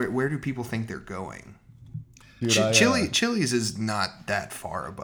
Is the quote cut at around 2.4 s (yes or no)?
yes